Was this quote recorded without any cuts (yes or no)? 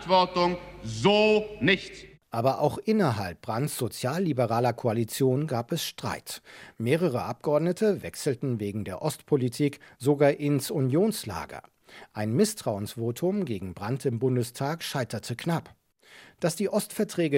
yes